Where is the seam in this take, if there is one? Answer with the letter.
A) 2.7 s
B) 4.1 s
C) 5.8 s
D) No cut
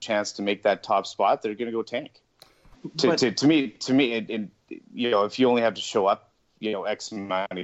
A